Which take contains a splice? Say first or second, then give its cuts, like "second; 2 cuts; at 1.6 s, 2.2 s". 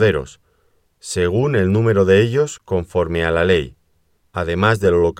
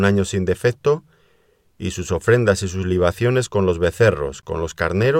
first; 1 cut; at 4.2 s